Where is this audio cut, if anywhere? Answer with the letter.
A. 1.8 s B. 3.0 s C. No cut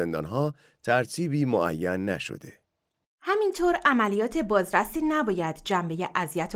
B